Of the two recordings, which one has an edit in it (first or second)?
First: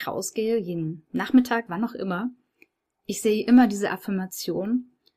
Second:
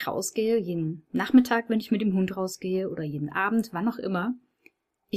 first